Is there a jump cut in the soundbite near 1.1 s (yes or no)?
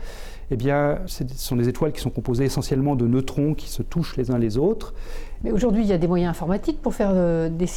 yes